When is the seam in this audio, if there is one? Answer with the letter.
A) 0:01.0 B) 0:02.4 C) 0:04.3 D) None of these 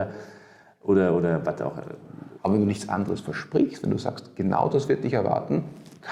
B